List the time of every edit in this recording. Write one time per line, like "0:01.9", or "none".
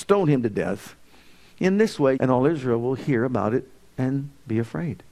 0:02.2